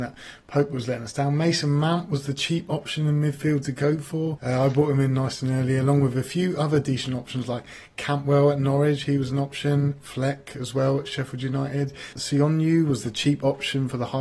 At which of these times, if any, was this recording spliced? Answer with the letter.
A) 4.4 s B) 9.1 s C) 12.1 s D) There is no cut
C